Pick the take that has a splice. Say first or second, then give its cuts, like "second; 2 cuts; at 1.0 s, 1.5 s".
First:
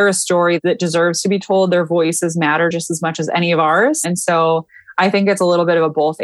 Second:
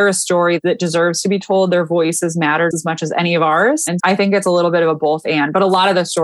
second; 2 cuts; at 2.7 s, 4.0 s